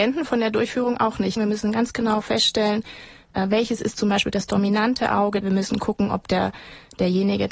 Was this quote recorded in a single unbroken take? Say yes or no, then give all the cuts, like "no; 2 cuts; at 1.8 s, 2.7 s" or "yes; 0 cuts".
no; 2 cuts; at 1.4 s, 5.4 s